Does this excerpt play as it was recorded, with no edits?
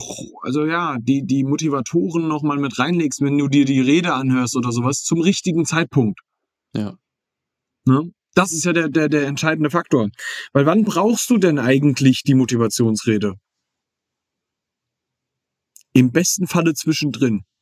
yes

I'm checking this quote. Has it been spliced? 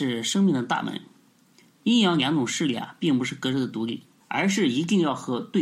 yes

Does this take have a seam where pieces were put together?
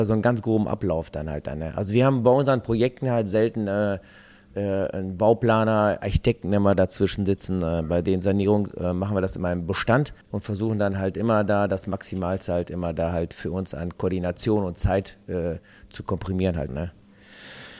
yes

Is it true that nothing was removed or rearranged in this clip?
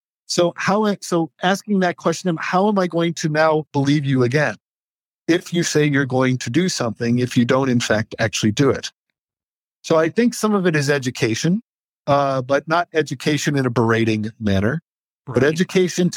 yes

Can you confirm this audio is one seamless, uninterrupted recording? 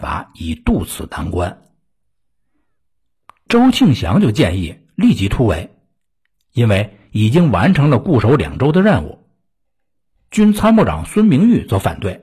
yes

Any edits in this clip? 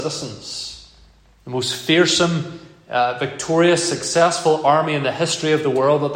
no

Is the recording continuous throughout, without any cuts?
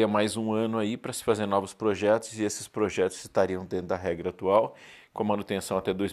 yes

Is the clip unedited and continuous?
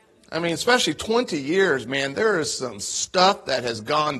yes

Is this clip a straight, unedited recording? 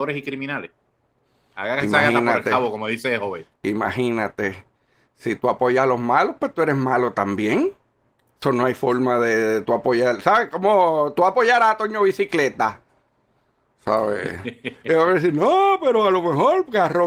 yes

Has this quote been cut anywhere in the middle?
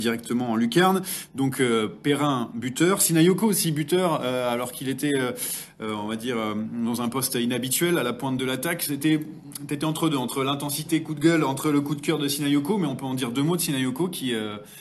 no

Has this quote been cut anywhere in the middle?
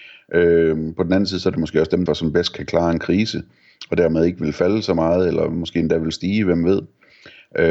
yes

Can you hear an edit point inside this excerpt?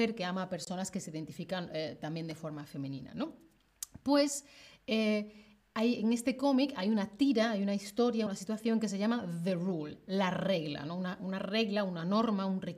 no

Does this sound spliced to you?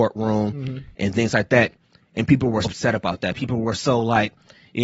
yes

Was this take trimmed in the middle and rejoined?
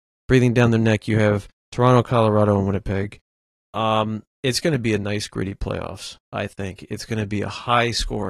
yes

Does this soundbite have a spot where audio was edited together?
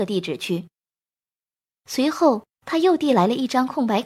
no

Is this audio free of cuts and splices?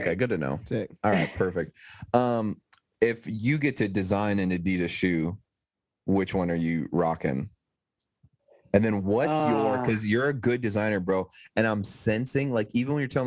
yes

